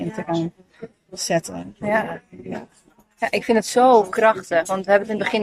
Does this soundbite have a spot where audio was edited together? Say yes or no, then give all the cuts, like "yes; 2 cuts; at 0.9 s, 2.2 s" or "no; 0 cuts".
no; 0 cuts